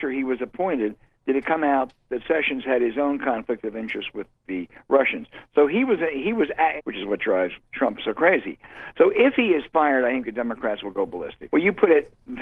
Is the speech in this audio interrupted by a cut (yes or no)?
yes